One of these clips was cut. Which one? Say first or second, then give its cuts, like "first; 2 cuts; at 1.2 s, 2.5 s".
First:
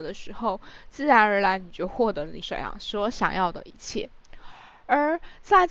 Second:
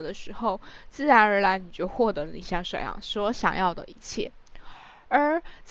first; 1 cut; at 2.4 s